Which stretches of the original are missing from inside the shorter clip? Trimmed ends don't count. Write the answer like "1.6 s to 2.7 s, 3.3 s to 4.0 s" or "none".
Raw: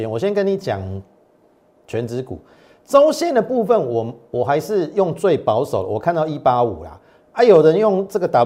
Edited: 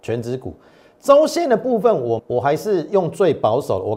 4.0 s to 4.2 s